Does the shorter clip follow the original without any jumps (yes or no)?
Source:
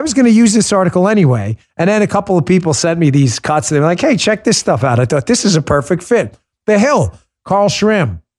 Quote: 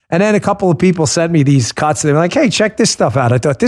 yes